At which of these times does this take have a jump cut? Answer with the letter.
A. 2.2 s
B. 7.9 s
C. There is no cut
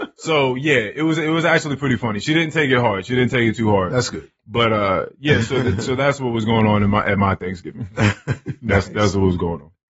C